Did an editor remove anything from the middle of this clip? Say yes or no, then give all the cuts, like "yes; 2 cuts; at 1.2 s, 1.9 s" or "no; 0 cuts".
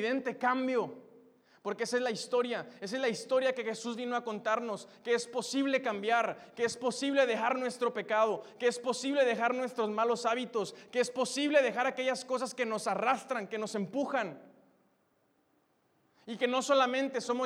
no; 0 cuts